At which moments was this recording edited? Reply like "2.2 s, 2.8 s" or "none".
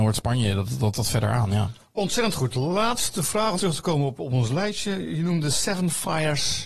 0.9 s, 3.5 s